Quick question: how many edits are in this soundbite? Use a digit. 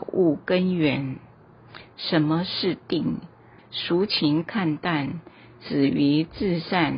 1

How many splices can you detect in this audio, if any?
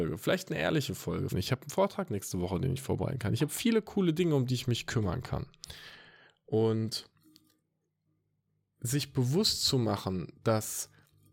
1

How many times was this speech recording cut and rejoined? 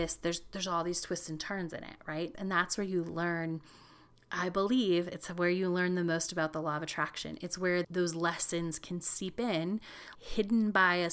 3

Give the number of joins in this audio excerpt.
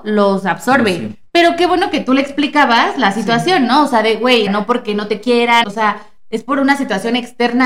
2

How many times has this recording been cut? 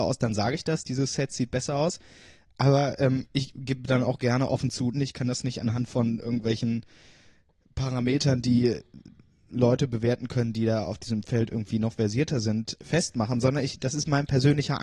2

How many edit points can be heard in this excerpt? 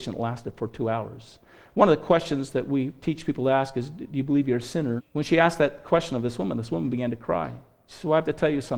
1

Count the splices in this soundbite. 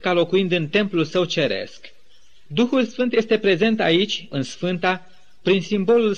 2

